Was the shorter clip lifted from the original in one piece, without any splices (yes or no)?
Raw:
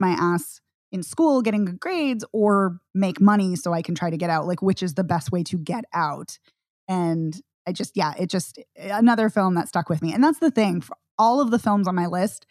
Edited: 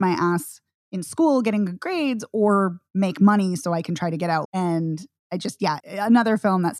no